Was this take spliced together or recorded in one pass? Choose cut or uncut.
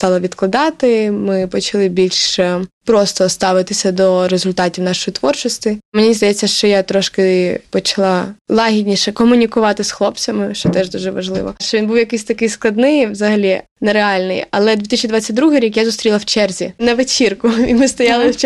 cut